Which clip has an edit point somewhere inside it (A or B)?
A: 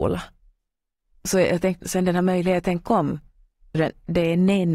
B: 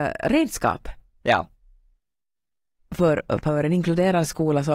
A